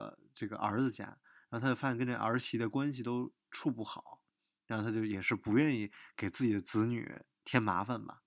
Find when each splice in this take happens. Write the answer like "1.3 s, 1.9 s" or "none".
none